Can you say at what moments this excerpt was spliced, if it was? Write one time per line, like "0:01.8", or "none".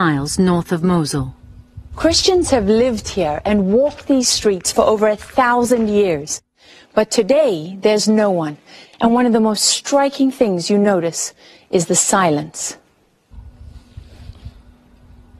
0:08.8